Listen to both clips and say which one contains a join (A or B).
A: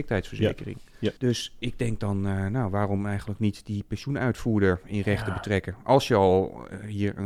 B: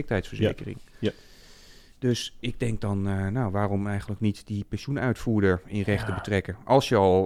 A